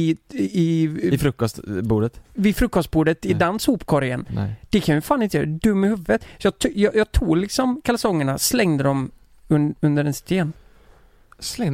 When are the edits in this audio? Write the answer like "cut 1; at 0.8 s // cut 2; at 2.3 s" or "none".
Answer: none